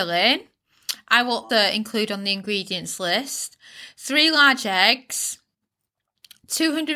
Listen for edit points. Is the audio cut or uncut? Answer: cut